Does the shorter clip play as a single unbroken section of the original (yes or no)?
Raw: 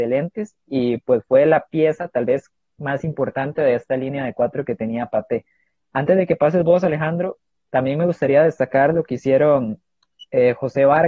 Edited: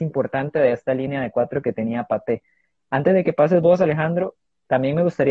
yes